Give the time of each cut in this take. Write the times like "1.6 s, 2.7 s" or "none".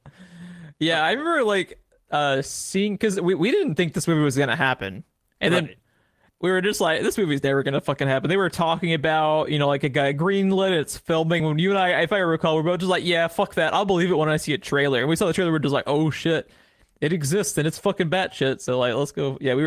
none